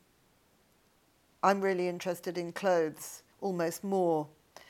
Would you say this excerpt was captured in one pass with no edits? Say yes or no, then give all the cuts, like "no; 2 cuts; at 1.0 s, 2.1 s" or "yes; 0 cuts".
no; 2 cuts; at 1.3 s, 3.3 s